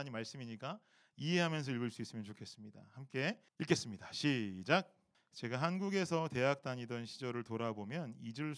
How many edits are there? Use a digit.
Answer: 2